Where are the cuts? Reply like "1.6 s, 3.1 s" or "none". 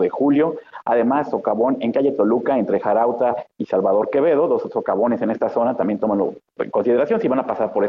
6.6 s